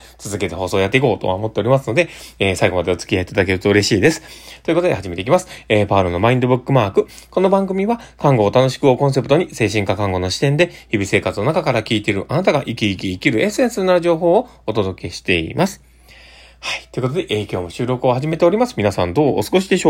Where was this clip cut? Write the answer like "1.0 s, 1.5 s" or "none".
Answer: none

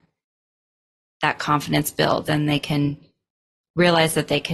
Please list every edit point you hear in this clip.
2.3 s

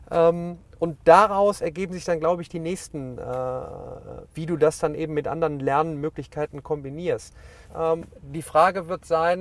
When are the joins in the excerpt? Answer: 4.2 s, 7.7 s

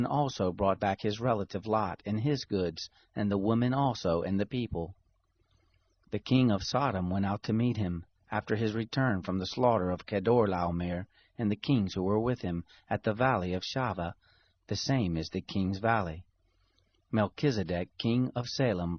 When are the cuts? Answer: none

